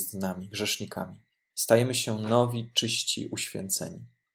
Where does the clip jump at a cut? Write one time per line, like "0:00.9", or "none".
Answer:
0:01.5